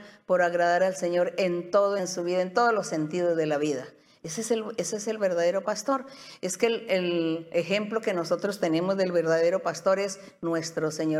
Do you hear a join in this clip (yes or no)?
yes